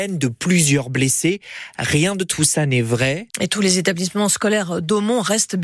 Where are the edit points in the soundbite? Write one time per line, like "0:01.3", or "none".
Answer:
0:03.3